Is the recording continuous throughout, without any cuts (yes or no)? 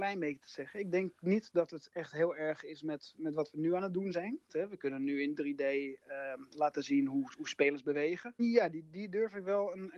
no